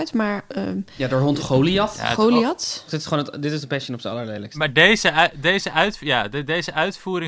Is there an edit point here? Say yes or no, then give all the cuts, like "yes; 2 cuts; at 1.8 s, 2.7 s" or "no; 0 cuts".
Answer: yes; 1 cut; at 2.9 s